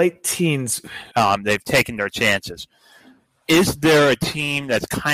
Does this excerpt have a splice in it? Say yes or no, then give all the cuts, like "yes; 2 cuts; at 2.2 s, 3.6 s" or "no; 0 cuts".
yes; 1 cut; at 1.1 s